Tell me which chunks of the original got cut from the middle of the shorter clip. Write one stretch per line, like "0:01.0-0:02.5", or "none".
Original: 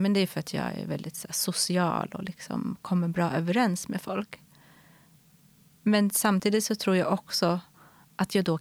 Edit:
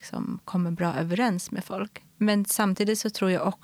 0:04.5-0:05.7